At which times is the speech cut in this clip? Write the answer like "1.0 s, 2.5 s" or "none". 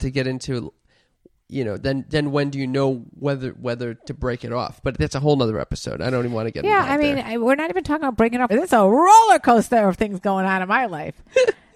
8.5 s